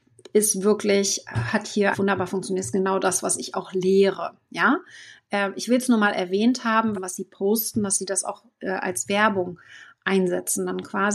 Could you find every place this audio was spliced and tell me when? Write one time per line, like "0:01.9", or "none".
0:01.9
0:06.9

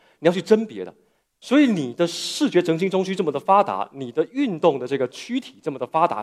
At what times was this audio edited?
none

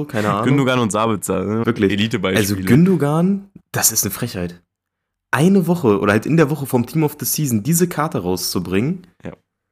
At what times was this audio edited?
0:01.6
0:03.6

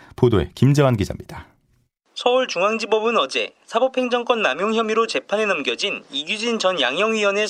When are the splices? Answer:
none

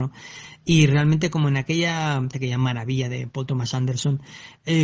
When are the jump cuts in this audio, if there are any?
0:02.3

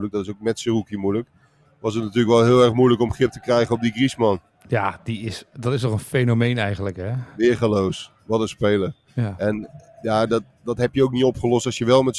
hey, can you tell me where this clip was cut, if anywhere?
none

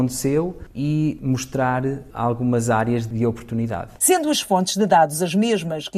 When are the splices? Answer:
none

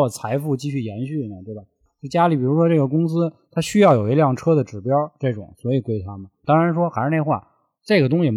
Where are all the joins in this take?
0:01.9
0:06.4

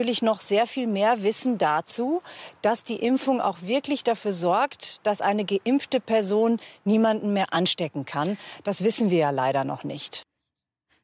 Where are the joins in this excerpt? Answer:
none

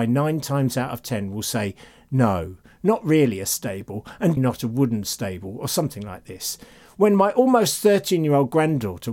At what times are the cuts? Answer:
0:04.4

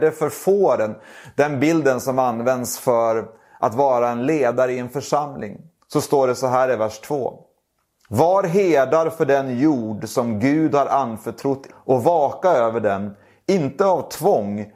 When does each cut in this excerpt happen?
0:11.7

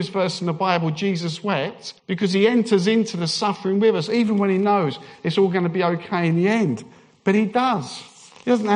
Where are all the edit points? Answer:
0:02.0

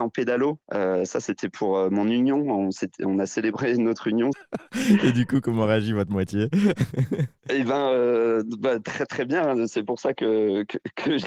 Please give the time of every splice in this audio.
0:04.3

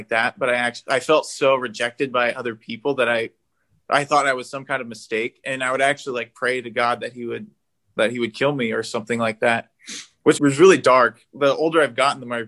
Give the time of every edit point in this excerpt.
0:10.4

